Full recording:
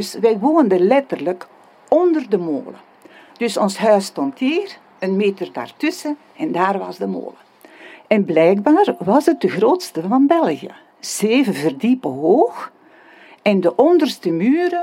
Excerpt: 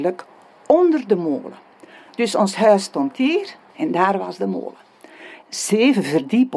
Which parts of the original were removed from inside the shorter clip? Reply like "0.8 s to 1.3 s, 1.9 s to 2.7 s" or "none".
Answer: 4.9 s to 6.3 s, 8.0 s to 10.9 s